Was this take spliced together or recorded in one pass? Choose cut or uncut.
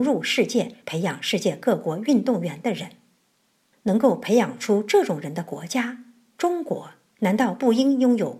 uncut